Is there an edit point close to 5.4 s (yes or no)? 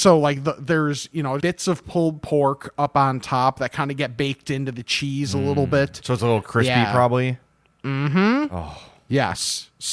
no